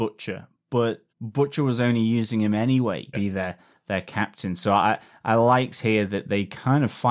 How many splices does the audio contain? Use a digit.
2